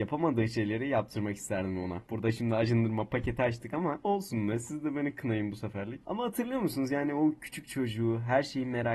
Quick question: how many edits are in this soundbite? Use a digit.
0